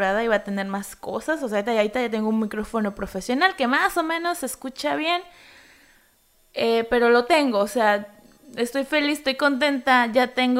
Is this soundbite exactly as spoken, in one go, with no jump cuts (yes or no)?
yes